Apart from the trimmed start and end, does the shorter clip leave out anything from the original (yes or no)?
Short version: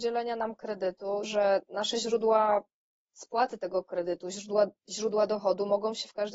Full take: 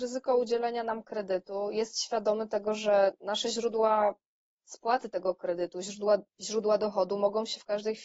yes